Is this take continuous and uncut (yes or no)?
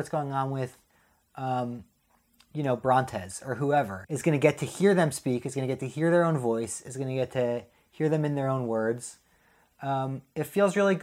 yes